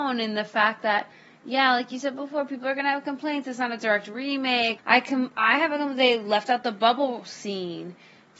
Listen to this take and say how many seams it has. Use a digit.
1